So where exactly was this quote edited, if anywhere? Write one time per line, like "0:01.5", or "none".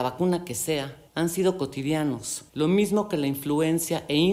0:01.1
0:02.5